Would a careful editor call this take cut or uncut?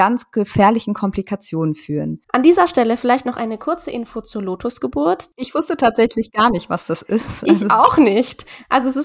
cut